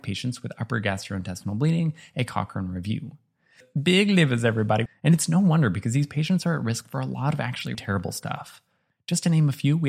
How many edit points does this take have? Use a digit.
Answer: 2